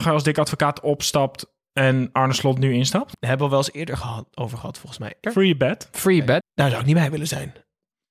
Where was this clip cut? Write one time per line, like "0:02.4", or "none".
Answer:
0:03.1
0:05.2
0:06.4